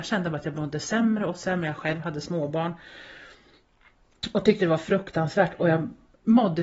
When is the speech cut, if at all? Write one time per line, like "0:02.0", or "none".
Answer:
none